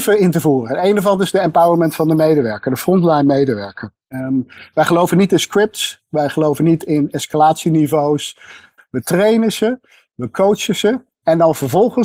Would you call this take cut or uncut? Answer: cut